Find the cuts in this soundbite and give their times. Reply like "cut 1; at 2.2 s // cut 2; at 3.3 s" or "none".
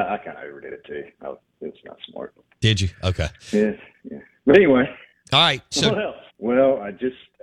cut 1; at 3.4 s // cut 2; at 6.3 s